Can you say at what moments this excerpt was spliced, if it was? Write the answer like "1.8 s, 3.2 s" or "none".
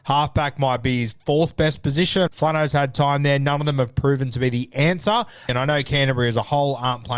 2.3 s, 5.5 s